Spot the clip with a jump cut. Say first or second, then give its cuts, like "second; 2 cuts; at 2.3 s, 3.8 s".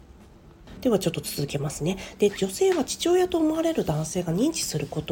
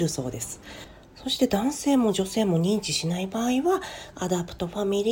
second; 1 cut; at 4.1 s